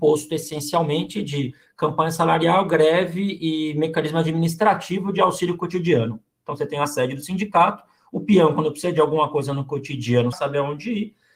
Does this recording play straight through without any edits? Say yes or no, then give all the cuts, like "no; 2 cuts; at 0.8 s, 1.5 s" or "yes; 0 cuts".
no; 1 cut; at 10.3 s